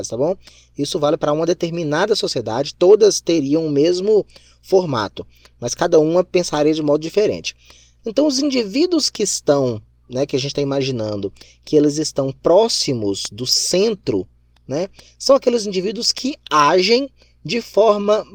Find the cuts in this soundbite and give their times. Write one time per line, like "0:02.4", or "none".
0:08.0